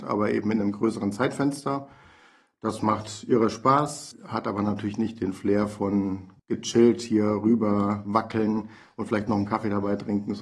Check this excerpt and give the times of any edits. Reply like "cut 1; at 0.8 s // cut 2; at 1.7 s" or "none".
cut 1; at 4.1 s // cut 2; at 6.4 s